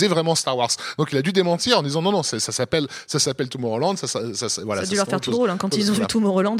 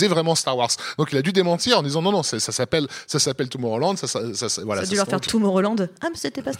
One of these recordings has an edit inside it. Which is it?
second; 1 cut; at 5.3 s

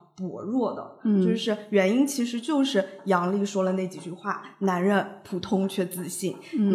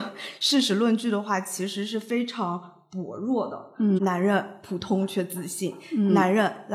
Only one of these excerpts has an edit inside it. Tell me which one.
second; 1 cut; at 4.0 s

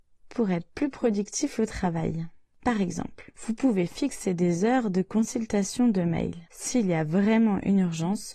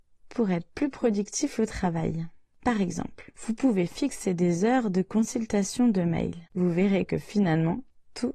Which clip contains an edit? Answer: second; 1 cut; at 6.5 s

